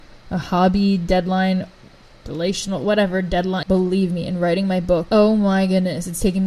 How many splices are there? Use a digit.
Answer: 2